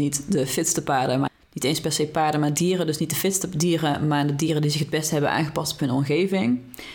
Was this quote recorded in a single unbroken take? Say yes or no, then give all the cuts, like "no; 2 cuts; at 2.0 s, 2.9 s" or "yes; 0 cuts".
yes; 0 cuts